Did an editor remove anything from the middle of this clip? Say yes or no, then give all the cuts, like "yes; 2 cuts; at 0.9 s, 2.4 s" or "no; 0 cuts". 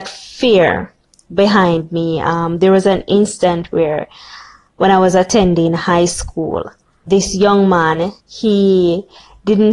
yes; 2 cuts; at 7.1 s, 8.2 s